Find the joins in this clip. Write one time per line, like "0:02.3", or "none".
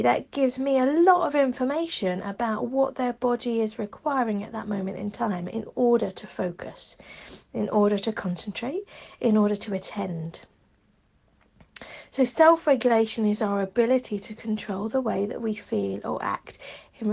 none